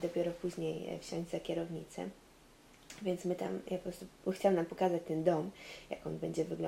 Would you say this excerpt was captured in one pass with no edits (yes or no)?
yes